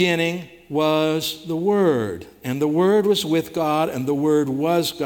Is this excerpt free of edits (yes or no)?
yes